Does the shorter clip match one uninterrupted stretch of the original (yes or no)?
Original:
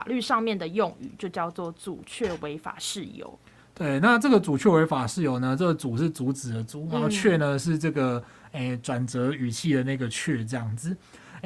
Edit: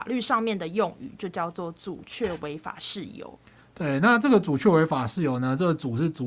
yes